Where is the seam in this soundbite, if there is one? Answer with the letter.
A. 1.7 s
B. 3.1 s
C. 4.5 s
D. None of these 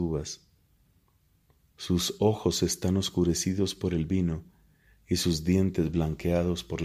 D